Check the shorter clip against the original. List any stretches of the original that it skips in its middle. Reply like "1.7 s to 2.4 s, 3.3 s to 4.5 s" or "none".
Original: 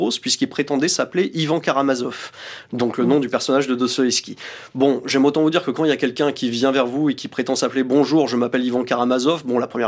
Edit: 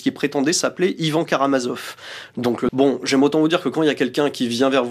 3.0 s to 4.7 s